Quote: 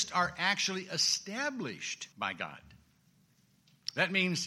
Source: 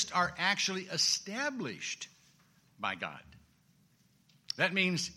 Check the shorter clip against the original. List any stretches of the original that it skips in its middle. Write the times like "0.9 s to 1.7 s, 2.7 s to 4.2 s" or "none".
2.1 s to 2.7 s